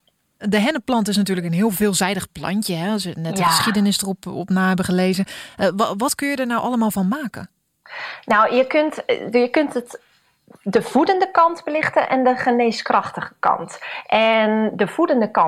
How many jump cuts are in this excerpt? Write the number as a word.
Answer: zero